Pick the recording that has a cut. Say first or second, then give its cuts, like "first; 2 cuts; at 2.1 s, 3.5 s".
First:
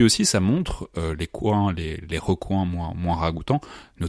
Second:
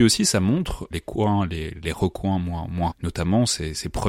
second; 2 cuts; at 0.9 s, 2.9 s